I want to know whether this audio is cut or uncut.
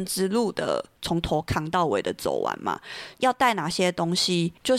cut